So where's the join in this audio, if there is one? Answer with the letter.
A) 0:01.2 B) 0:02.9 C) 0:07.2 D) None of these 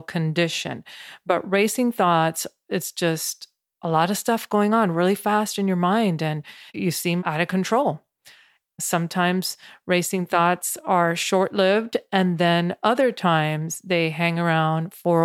C